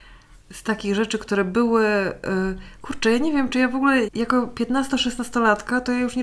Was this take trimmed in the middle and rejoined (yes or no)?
yes